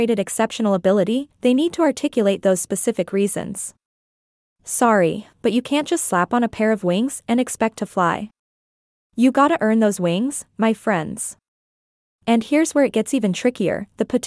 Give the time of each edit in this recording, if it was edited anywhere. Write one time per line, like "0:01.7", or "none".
0:05.3